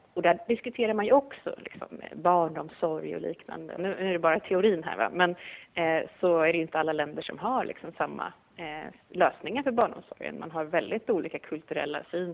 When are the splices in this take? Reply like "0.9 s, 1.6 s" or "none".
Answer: 3.8 s